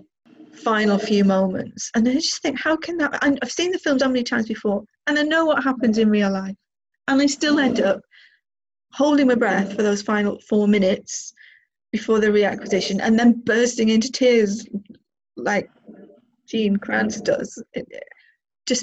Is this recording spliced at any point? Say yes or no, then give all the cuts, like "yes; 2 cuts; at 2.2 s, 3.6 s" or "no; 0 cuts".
yes; 1 cut; at 4.0 s